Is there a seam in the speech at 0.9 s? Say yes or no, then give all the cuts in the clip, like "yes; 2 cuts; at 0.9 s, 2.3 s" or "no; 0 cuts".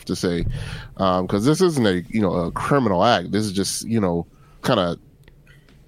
no; 1 cut; at 4.6 s